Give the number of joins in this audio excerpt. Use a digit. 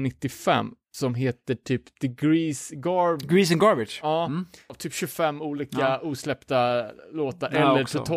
0